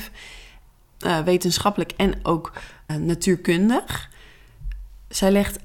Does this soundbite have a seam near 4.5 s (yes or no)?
no